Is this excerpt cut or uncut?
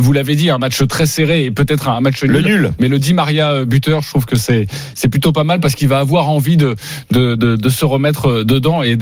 uncut